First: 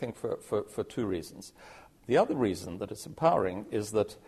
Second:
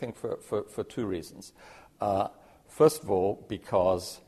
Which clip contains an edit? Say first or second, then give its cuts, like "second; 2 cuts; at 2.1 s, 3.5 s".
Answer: first; 1 cut; at 2.0 s